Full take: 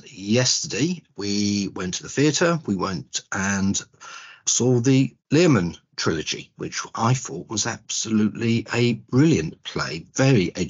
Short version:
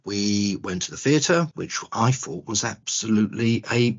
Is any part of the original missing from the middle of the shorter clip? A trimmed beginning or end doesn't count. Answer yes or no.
yes